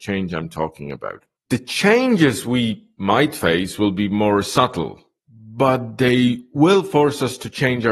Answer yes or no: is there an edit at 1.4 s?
no